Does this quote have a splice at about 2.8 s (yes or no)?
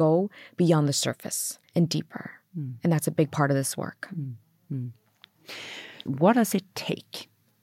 no